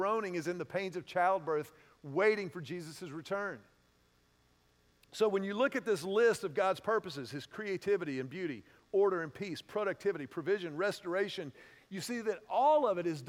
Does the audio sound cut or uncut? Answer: uncut